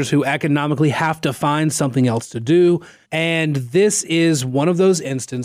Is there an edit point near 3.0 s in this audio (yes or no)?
yes